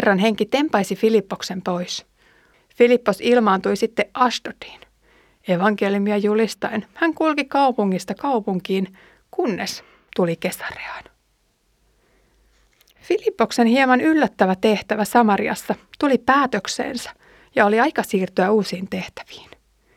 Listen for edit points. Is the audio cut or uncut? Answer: cut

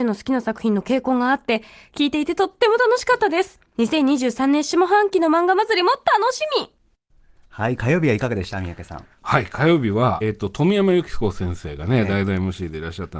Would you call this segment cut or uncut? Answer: cut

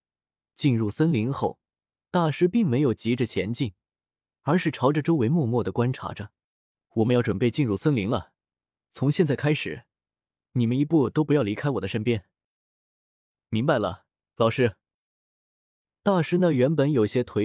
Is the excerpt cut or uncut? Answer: uncut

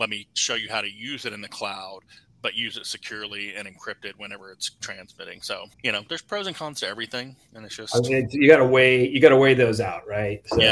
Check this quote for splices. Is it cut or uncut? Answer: cut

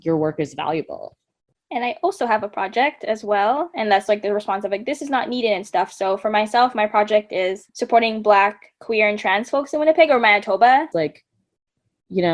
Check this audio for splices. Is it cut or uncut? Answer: cut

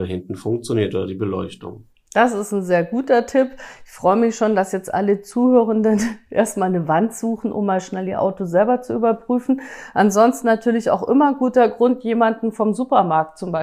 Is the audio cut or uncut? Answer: uncut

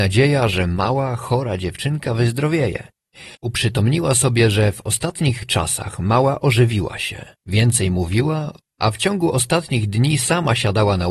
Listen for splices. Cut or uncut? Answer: cut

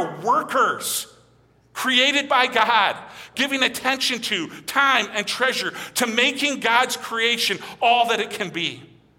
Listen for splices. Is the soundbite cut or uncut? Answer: cut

